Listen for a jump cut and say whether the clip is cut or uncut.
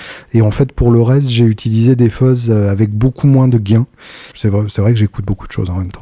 cut